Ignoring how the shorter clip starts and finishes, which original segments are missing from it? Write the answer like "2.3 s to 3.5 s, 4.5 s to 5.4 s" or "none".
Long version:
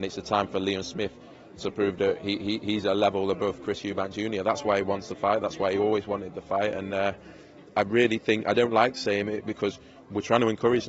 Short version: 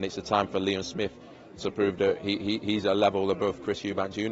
none